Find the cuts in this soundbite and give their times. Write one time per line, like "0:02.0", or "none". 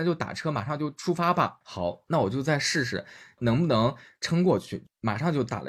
0:01.6